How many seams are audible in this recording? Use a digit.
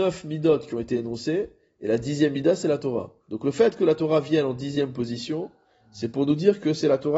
1